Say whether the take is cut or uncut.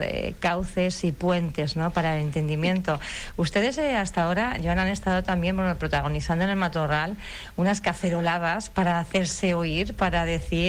uncut